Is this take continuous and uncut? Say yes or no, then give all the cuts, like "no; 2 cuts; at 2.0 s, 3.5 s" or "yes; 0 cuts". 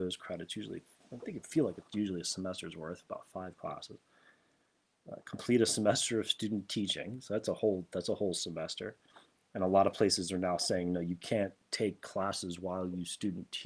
yes; 0 cuts